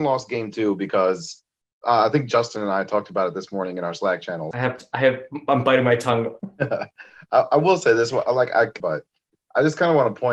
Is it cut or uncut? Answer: cut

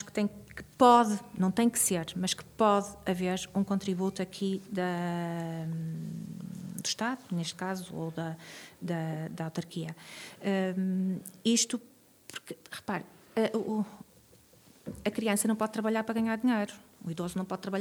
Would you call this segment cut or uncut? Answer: uncut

